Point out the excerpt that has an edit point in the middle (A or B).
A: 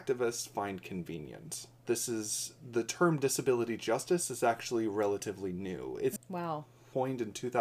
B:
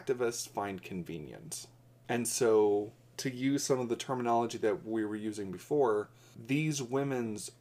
A